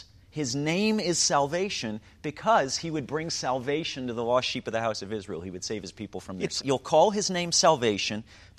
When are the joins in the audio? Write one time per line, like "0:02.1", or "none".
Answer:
0:06.6